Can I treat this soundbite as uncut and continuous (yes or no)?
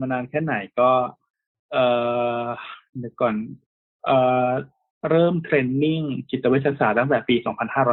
yes